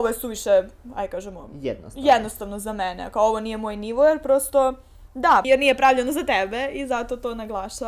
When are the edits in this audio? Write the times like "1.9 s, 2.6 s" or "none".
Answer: 5.4 s